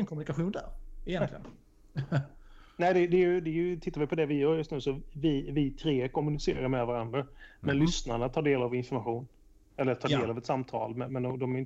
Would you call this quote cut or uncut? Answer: uncut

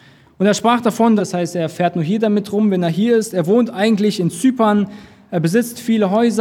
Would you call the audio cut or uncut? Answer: cut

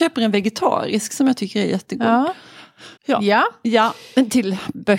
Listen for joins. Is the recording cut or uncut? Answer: cut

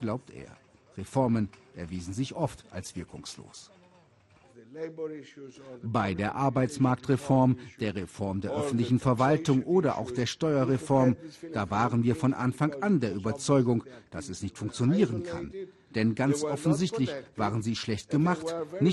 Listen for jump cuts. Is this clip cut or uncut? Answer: uncut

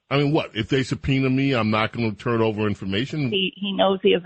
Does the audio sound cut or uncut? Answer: cut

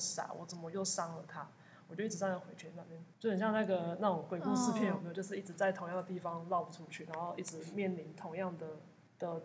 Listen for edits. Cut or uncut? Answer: uncut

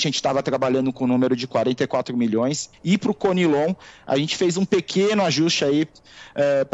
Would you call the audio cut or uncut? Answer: cut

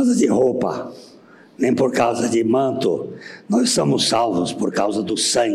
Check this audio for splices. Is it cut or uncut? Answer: uncut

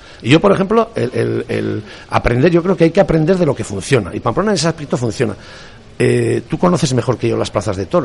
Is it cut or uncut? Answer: uncut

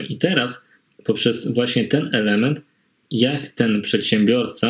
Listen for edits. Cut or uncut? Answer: uncut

